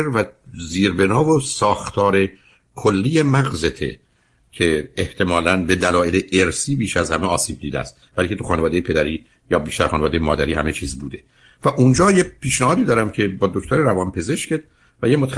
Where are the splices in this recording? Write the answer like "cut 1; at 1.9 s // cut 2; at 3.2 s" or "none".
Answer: none